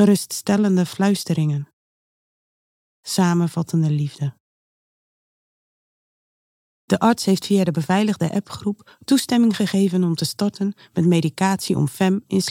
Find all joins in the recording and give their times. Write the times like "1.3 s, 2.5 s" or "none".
none

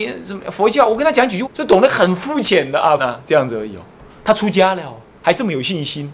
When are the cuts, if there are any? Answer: 1.4 s, 3.0 s

